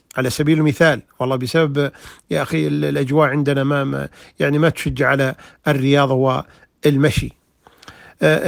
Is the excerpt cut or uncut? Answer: uncut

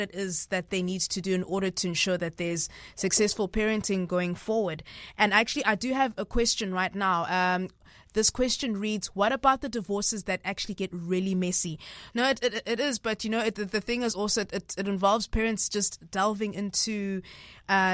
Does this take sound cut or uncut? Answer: cut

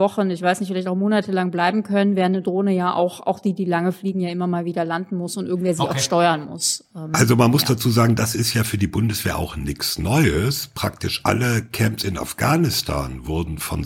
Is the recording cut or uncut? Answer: uncut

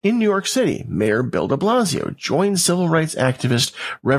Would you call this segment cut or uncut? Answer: uncut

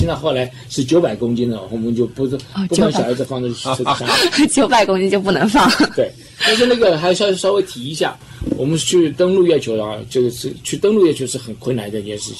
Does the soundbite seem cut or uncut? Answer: uncut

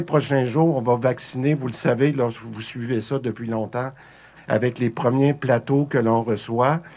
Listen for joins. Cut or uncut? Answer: cut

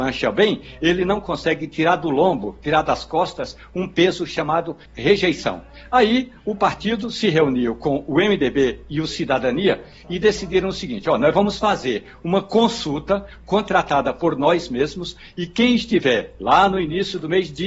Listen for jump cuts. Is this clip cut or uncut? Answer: cut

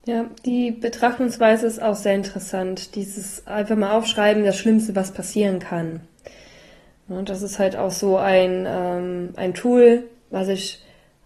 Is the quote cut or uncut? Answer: uncut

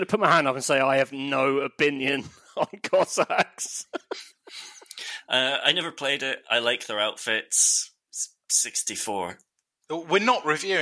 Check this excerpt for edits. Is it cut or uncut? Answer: uncut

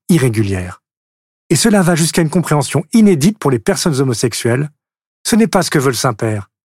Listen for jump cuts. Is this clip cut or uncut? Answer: cut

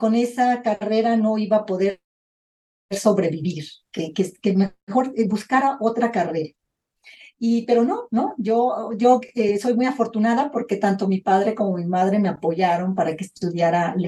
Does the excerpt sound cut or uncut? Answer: uncut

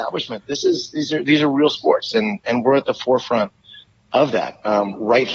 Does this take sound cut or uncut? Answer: uncut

